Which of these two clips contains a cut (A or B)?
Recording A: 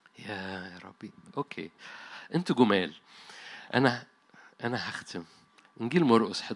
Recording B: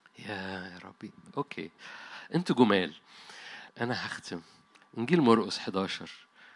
B